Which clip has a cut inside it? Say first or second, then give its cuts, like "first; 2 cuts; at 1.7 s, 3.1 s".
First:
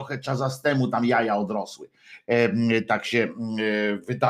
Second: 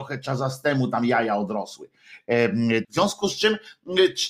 second; 1 cut; at 2.8 s